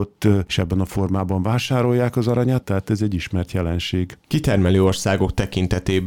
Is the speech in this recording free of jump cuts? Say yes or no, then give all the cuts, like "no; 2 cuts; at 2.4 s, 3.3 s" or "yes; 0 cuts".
no; 1 cut; at 2.6 s